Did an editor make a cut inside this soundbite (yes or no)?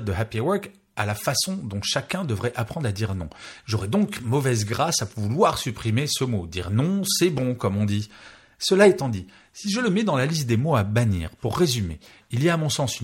no